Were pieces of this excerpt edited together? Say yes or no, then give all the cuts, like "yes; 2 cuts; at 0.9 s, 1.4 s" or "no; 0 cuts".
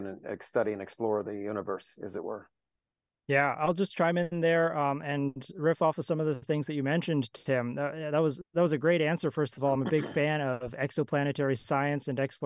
no; 0 cuts